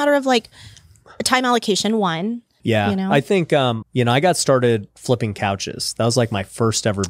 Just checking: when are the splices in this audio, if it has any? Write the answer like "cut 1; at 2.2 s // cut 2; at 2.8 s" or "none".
cut 1; at 2.6 s // cut 2; at 3.8 s